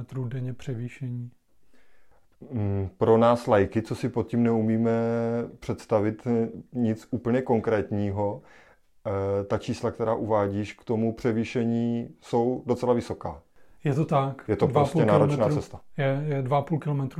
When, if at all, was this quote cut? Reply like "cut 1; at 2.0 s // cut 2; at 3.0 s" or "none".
none